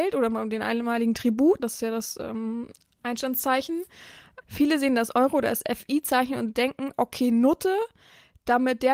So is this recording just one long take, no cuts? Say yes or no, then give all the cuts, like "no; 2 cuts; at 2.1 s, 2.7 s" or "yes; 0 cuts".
no; 2 cuts; at 1.6 s, 4.4 s